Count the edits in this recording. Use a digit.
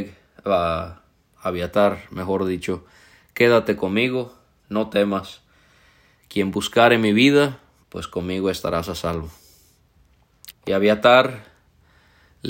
2